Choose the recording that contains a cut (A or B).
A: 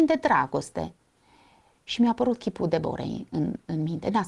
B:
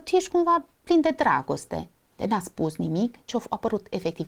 B